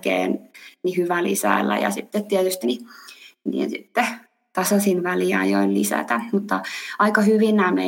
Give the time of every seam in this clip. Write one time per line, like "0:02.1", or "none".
0:02.6